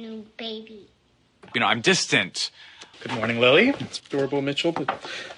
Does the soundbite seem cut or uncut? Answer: cut